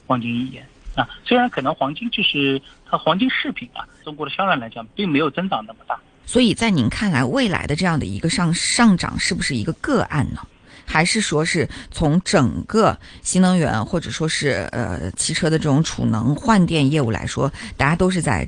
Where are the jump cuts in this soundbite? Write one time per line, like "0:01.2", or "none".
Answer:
0:04.0
0:06.2